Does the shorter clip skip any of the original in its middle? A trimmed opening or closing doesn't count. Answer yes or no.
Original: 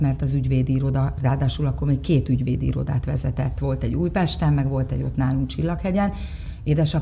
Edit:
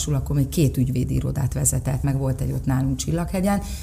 yes